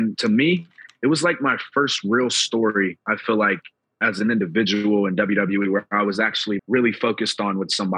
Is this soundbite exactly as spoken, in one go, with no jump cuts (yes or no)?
no